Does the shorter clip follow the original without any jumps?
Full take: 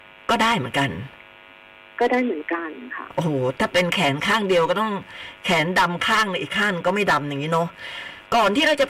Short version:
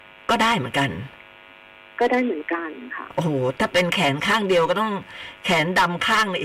yes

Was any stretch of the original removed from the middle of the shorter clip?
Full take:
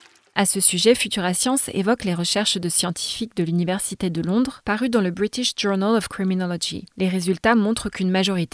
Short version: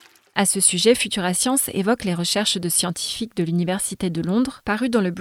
no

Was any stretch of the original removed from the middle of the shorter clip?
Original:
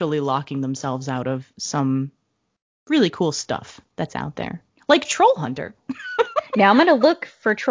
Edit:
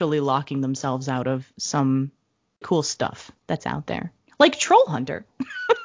yes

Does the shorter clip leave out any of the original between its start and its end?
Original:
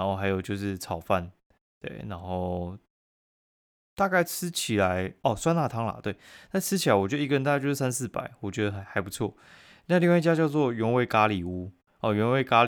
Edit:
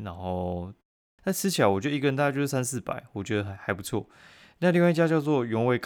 yes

